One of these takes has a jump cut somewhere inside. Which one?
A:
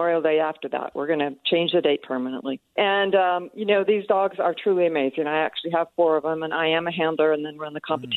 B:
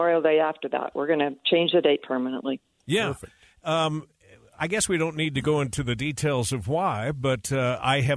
A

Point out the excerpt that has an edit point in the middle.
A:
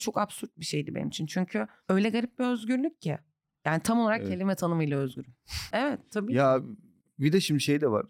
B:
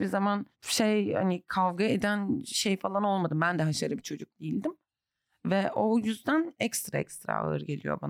A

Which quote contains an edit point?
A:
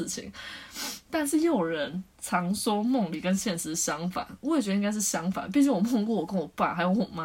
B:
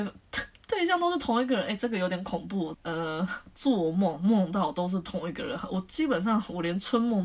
B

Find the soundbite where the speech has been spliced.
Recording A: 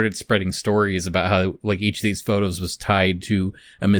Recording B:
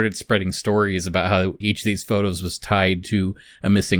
B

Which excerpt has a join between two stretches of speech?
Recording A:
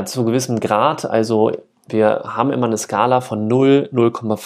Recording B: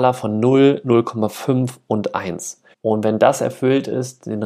B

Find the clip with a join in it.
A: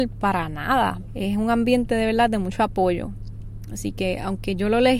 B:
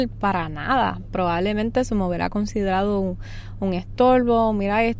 A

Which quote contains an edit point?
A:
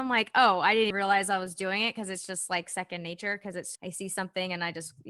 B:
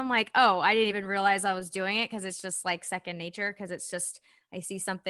A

